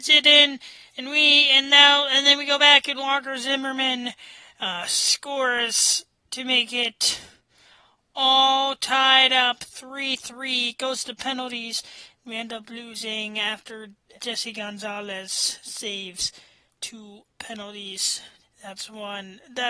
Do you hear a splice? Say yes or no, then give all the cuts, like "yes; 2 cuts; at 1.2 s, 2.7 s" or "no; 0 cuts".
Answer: yes; 2 cuts; at 14.2 s, 18.4 s